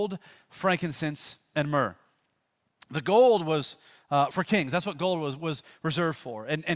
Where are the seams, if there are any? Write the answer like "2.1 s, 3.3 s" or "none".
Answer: 4.3 s

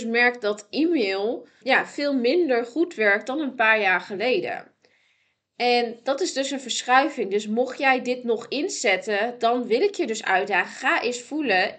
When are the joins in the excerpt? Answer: 1.6 s

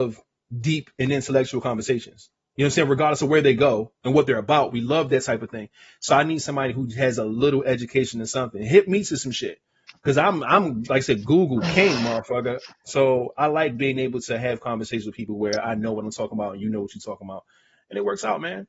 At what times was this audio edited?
none

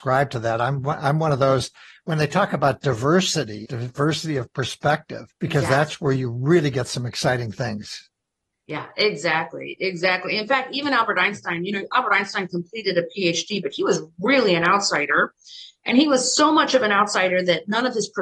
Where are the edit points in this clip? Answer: 3.6 s, 5.3 s

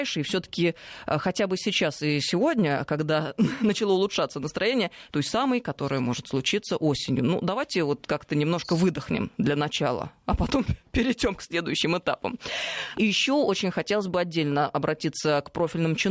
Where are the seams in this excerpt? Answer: 5.1 s, 12.9 s

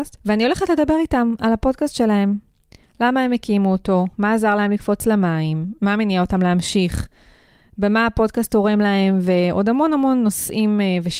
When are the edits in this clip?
none

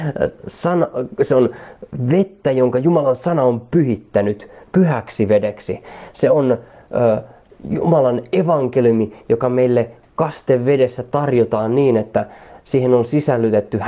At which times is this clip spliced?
none

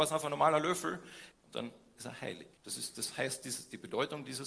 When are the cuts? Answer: 1.3 s, 2.6 s

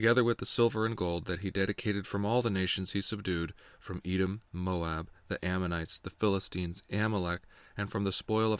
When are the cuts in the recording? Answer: none

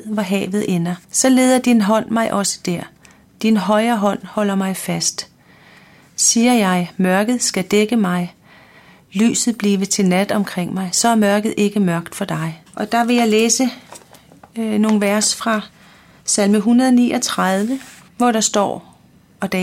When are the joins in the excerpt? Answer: 1.0 s, 12.7 s, 18.1 s

